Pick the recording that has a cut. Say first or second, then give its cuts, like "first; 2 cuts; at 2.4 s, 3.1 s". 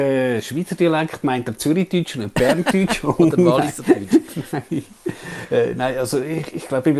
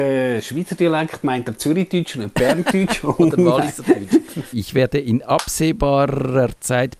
second; 1 cut; at 4.5 s